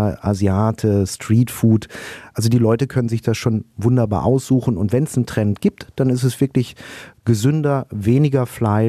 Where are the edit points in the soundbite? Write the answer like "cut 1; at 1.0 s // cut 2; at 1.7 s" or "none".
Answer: none